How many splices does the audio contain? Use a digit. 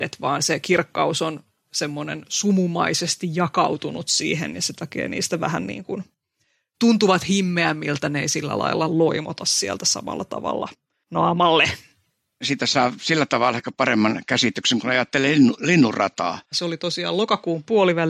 2